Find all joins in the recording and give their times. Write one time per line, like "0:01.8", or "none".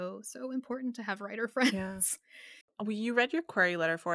0:02.6

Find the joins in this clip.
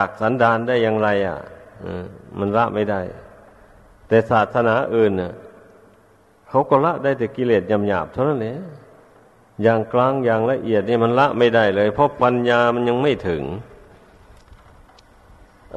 none

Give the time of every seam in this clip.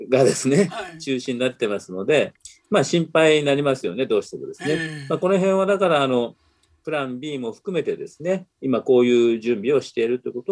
none

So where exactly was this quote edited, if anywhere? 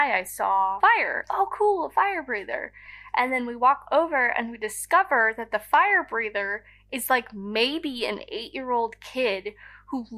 0:01.2

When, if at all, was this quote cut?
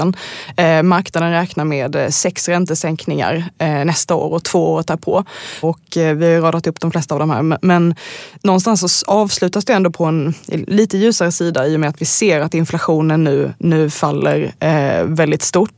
0:05.6

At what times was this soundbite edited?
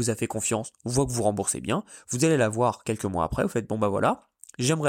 none

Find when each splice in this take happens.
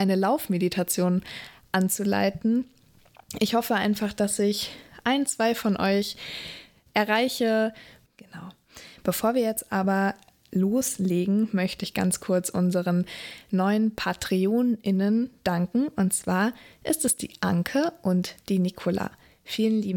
0:08.1

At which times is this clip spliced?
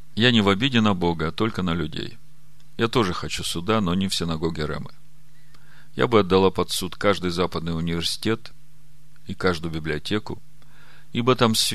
none

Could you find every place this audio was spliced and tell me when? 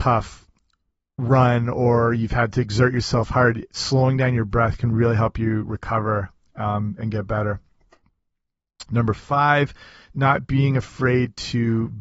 none

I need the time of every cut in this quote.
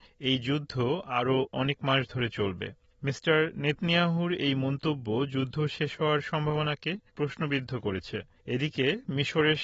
none

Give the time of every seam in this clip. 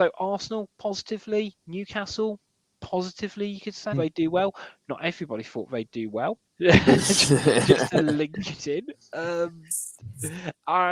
0:03.9
0:06.5

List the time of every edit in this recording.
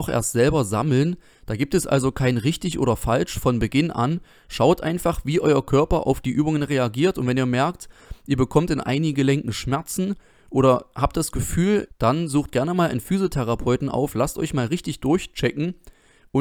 0:11.9

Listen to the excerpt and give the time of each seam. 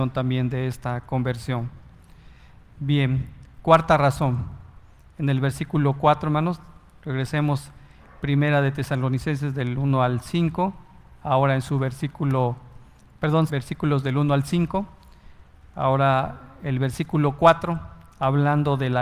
0:13.5

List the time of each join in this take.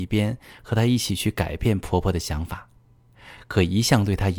none

